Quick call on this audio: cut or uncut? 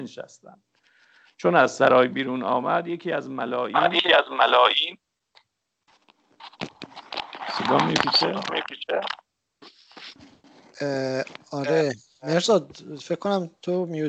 uncut